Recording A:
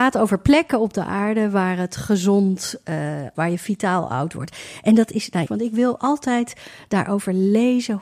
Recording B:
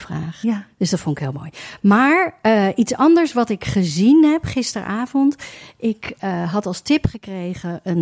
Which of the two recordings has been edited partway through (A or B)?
A